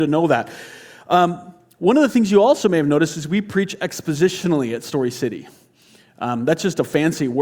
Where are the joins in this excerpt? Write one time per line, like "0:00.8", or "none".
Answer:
none